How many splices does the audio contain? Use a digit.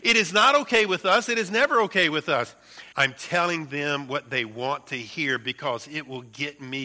1